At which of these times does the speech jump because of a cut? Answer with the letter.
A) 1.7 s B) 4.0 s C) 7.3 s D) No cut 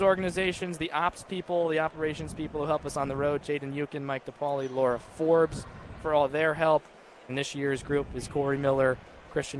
C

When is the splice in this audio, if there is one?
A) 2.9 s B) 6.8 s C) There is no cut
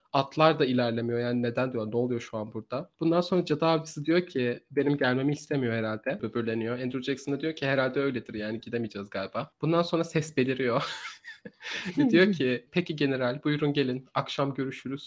A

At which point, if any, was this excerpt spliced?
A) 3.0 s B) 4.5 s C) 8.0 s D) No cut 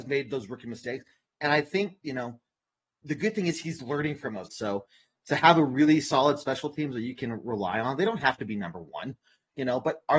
B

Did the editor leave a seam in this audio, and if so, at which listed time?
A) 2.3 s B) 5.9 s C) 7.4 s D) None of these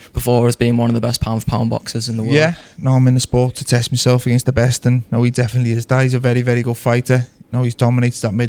D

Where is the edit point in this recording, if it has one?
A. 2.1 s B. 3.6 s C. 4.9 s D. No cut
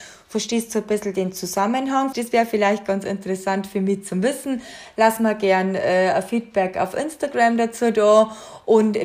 A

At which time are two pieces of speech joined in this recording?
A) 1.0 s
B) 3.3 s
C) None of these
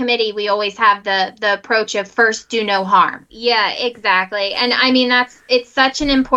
B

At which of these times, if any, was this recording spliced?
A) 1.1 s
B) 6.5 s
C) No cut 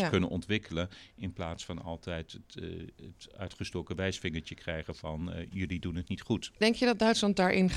C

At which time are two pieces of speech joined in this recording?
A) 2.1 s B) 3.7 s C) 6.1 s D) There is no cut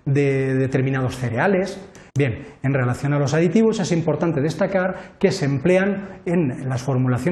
A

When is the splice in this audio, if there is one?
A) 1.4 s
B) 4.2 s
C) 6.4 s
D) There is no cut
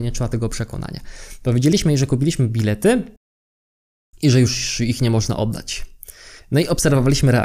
D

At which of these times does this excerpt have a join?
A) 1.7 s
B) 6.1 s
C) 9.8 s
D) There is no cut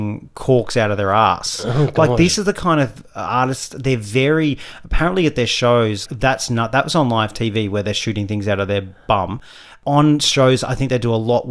B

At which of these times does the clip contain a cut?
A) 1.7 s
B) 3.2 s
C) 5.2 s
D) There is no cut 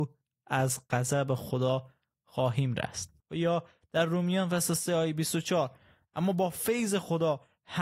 B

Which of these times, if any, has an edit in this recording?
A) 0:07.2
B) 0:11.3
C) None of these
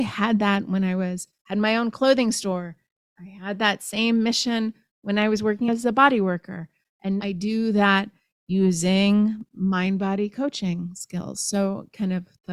A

